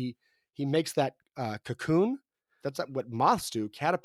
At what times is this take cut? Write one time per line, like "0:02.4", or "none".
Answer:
0:02.6